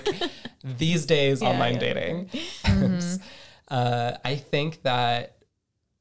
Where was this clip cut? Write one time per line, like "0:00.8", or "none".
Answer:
0:01.4
0:02.6